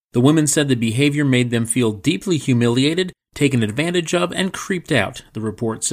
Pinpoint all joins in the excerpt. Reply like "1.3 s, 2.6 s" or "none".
none